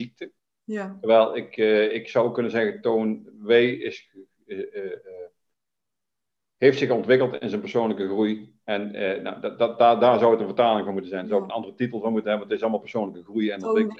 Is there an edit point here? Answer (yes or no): no